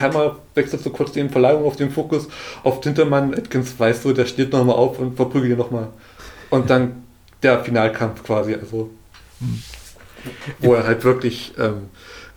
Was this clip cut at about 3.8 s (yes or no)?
no